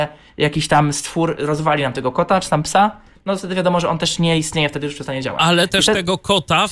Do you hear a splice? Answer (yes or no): no